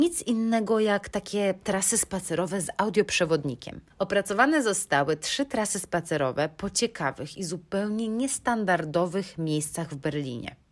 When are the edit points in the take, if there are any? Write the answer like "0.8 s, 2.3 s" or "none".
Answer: 3.9 s